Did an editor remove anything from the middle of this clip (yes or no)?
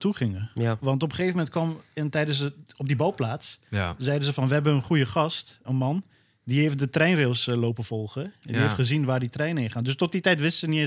yes